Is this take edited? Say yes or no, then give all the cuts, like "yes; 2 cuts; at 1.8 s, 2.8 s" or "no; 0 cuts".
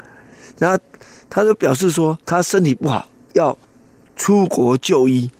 yes; 1 cut; at 2.2 s